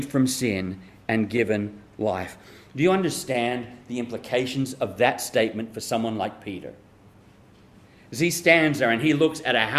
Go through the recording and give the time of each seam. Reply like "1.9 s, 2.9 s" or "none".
none